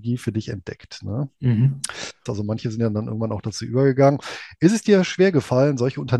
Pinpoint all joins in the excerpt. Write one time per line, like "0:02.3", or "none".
0:02.3